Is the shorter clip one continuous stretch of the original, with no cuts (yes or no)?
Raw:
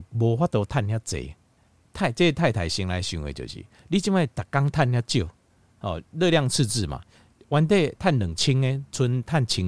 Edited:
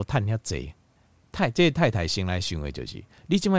yes